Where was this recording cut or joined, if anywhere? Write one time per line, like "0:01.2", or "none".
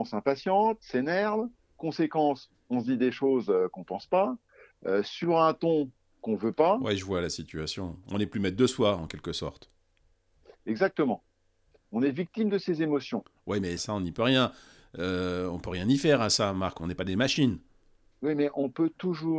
0:13.8
0:16.8